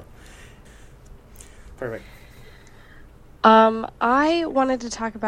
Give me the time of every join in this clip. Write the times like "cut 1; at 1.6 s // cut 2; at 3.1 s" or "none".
cut 1; at 1.8 s